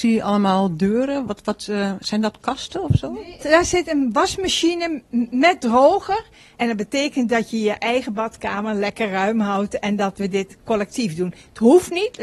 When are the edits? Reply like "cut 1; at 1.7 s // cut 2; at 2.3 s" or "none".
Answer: cut 1; at 3.4 s // cut 2; at 6.6 s